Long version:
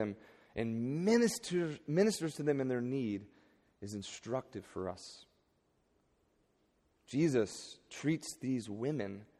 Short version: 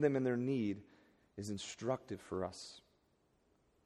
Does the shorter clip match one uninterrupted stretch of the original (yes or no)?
yes